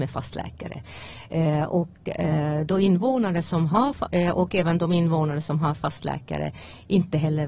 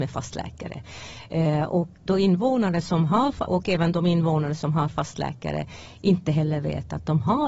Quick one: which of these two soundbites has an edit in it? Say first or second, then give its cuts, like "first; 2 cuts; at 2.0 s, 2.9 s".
second; 2 cuts; at 2.1 s, 3.5 s